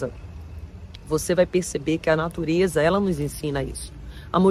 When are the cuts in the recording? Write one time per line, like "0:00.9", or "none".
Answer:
none

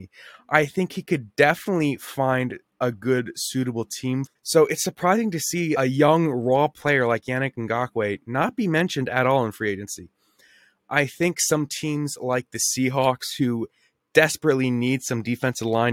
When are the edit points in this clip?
0:04.3

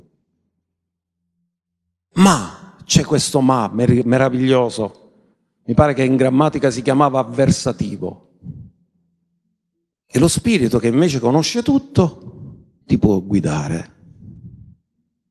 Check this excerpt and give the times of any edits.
0:09.9
0:12.8

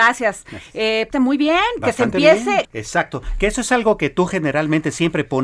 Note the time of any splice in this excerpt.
0:01.1
0:02.6

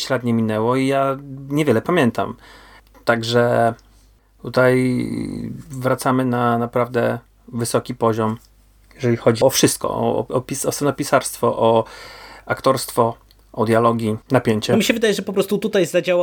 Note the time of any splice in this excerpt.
0:09.4
0:14.2

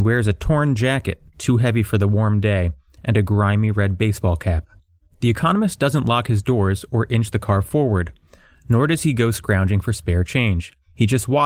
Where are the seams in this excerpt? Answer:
none

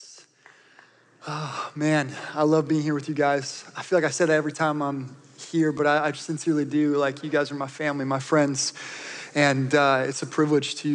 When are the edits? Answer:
none

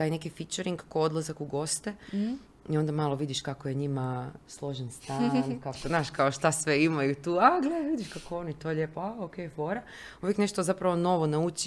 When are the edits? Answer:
none

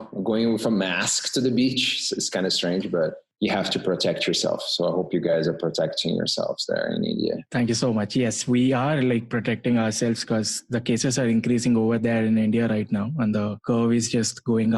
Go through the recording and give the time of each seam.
none

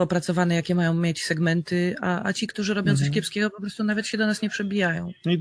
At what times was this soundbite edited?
0:02.2

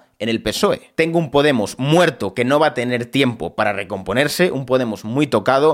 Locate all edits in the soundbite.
0:00.9

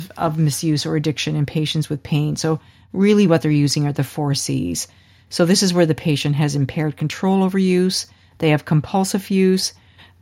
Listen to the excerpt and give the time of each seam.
none

